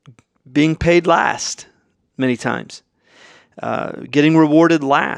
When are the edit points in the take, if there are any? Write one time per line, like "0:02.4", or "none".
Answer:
none